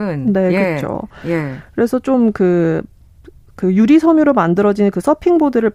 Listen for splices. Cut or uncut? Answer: uncut